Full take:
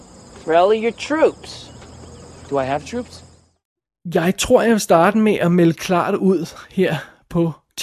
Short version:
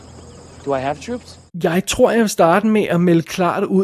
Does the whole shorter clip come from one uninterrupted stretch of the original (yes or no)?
no